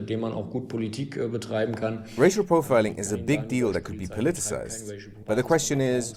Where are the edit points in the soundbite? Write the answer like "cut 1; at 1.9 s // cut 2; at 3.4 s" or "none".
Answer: cut 1; at 5.2 s